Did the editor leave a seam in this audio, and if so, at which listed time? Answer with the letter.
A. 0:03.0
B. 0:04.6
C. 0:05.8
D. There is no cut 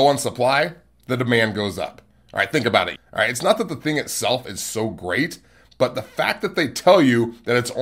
A